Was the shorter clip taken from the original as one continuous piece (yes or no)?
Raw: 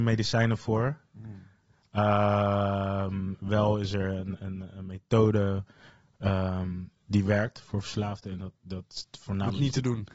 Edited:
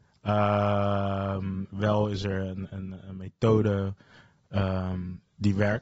yes